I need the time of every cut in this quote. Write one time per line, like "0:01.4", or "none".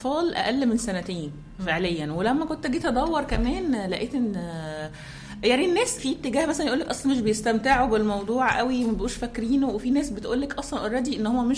0:06.0